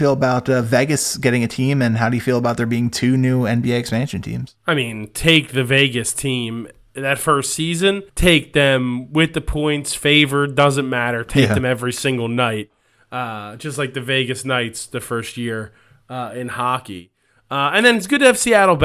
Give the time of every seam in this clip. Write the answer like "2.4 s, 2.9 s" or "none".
8.1 s